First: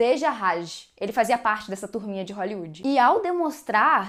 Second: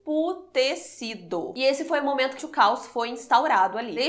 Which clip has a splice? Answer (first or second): second